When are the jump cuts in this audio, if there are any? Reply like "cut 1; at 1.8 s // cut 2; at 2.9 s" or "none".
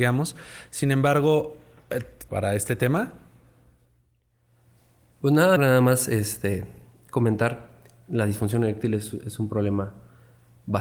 cut 1; at 2.3 s // cut 2; at 5.6 s